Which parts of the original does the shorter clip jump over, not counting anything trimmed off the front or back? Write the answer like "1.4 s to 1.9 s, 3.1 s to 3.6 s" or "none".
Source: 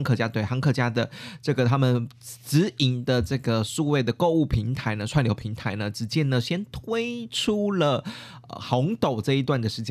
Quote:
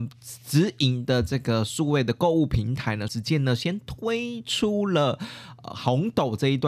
5.1 s to 5.9 s